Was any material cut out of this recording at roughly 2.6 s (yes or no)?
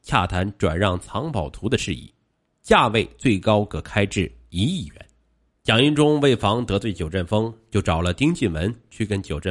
no